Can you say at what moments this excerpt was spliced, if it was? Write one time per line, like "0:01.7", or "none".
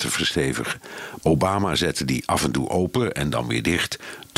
0:01.2